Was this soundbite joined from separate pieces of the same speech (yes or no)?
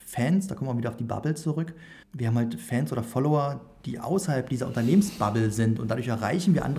yes